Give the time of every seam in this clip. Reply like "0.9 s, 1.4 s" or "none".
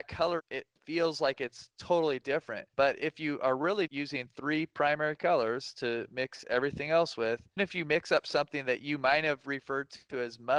2.7 s, 3.9 s, 7.6 s